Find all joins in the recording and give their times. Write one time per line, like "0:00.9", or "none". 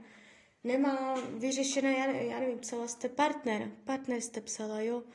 none